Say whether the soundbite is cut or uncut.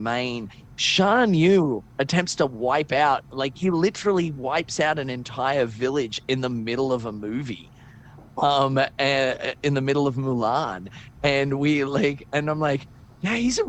uncut